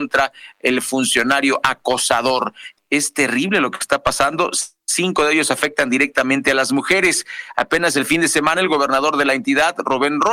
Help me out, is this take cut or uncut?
cut